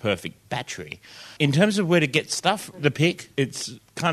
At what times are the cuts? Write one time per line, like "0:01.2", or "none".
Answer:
0:02.7